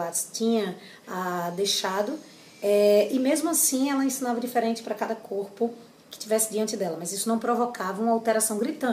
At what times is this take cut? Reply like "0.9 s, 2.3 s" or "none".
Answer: none